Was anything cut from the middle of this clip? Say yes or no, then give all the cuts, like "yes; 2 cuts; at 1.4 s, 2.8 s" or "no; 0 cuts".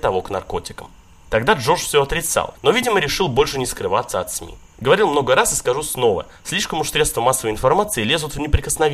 no; 0 cuts